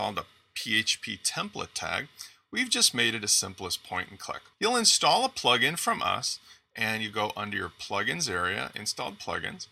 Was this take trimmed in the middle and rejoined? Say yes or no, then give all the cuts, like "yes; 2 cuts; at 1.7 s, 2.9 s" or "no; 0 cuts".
yes; 1 cut; at 4.5 s